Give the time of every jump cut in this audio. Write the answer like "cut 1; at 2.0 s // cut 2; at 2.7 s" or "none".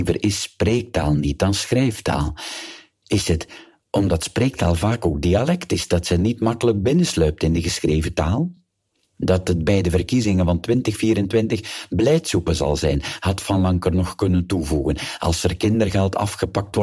none